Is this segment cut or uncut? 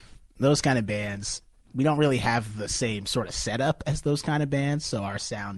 uncut